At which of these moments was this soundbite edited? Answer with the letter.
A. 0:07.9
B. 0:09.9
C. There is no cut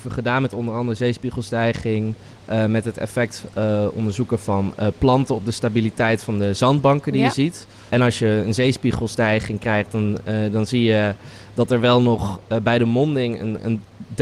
A